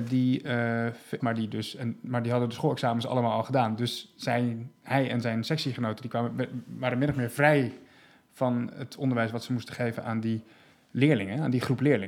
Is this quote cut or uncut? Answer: cut